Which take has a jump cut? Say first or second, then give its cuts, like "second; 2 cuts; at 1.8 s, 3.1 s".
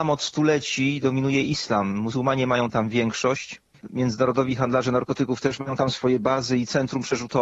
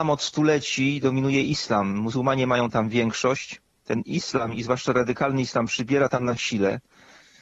first; 1 cut; at 3.7 s